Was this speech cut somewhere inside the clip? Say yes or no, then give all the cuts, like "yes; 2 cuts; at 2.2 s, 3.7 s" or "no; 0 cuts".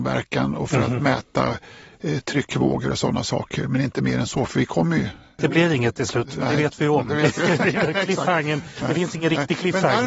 no; 0 cuts